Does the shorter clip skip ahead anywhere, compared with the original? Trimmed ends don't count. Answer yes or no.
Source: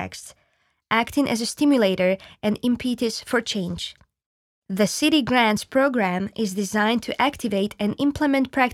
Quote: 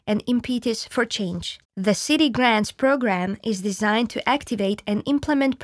yes